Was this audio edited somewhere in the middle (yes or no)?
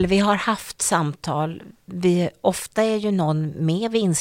no